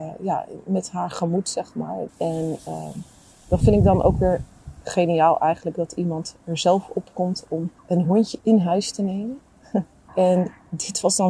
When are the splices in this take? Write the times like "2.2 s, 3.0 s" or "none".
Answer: 2.1 s, 7.8 s, 10.1 s